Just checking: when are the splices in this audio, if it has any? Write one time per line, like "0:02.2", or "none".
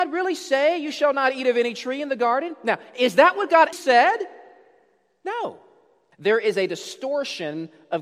0:03.7
0:06.1